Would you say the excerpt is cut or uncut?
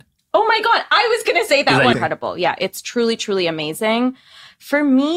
cut